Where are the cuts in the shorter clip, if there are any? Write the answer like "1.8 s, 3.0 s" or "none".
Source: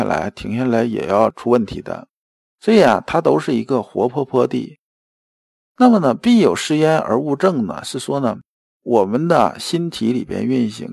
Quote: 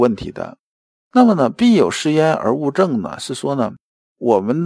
0.9 s